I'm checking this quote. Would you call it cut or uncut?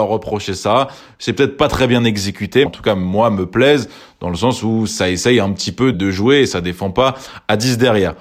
cut